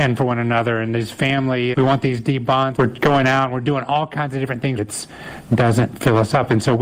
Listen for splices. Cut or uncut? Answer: cut